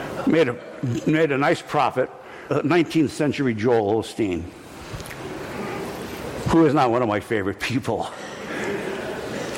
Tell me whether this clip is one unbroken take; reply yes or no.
no